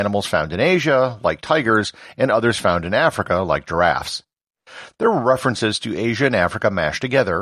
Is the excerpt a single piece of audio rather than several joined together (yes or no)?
no